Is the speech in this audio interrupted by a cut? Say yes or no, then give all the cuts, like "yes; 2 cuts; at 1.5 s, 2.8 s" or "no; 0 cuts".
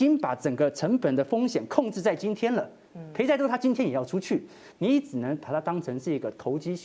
yes; 1 cut; at 4.7 s